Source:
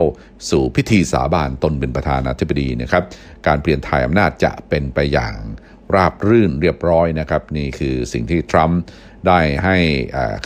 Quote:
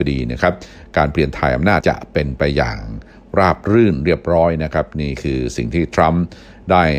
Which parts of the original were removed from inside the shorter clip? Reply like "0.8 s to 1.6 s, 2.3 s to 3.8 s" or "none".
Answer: 4.3 s to 4.4 s